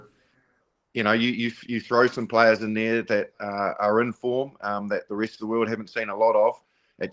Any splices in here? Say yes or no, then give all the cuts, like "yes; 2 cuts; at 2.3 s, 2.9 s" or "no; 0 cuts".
no; 0 cuts